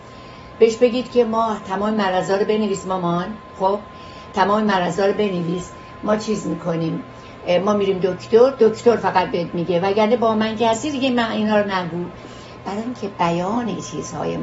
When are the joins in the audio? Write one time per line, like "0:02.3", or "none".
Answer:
none